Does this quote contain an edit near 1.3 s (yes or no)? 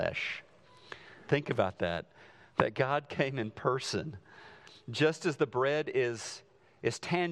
yes